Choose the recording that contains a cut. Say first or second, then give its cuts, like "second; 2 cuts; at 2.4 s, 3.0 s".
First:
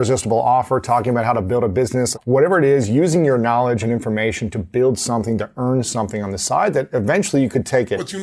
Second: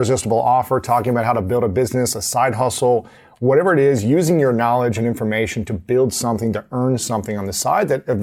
first; 1 cut; at 2.1 s